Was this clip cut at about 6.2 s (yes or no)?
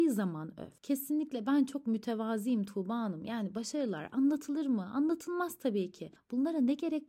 yes